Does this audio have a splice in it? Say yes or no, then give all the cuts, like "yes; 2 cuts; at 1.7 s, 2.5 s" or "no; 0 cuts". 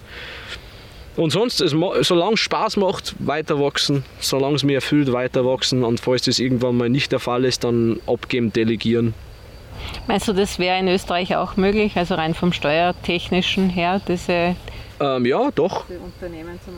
no; 0 cuts